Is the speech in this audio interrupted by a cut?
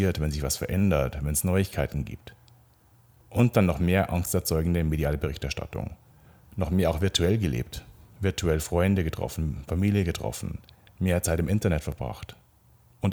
no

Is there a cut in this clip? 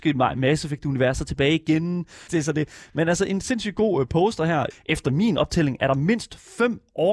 yes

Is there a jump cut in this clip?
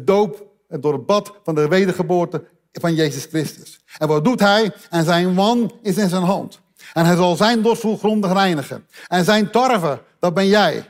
no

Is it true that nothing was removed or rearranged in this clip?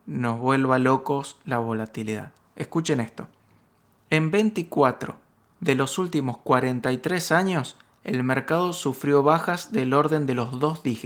yes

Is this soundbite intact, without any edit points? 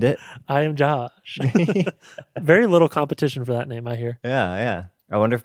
yes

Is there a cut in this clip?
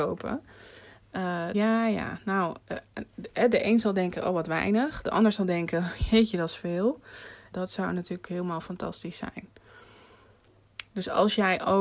yes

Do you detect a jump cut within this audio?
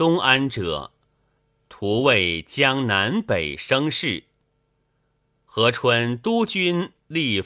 no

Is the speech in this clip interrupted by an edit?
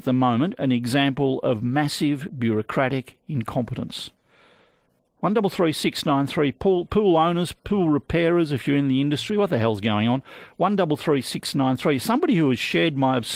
no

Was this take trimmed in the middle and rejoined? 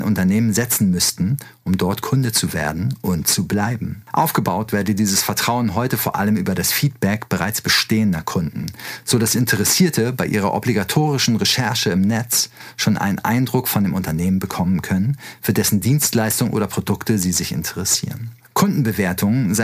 no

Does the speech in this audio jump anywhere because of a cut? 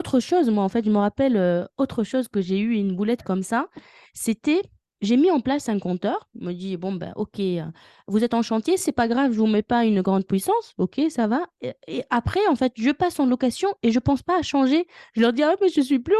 no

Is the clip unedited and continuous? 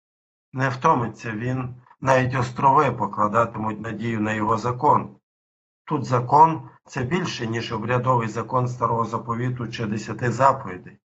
no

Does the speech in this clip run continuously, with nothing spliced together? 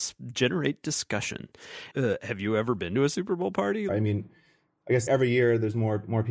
no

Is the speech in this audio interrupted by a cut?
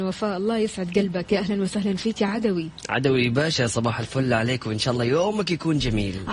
no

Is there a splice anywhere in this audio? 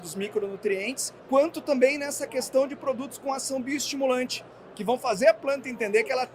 yes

